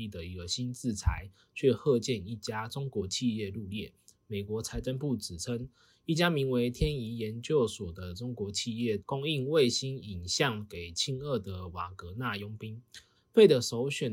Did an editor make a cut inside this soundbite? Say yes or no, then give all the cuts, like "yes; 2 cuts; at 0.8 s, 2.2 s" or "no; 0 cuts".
yes; 2 cuts; at 9.0 s, 13.1 s